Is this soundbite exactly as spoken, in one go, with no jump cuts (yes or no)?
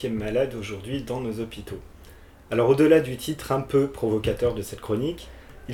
yes